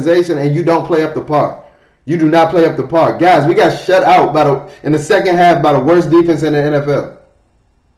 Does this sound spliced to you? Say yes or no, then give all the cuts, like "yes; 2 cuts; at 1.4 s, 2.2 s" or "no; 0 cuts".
no; 0 cuts